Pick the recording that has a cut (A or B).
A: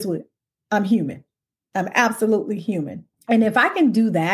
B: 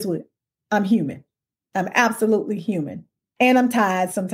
A